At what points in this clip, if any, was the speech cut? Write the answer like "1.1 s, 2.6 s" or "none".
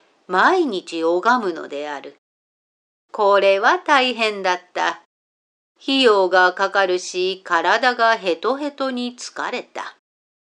none